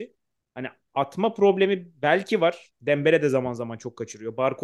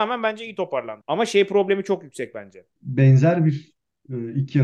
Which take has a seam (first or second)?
second